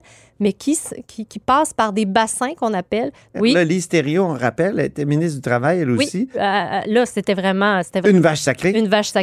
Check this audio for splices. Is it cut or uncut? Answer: cut